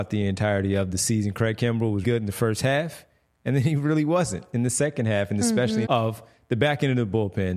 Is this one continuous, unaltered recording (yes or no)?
no